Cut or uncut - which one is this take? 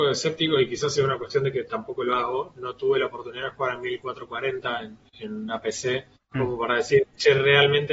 uncut